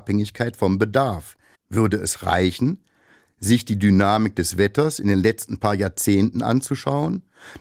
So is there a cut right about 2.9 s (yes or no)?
no